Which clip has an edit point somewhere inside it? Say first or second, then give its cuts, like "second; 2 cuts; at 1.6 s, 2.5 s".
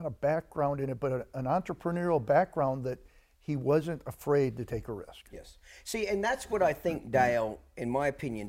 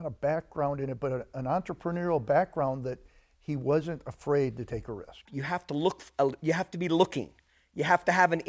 second; 1 cut; at 5.3 s